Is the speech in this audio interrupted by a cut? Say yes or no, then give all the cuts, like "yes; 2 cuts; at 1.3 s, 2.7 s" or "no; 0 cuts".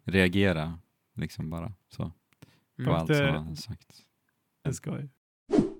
yes; 1 cut; at 4.6 s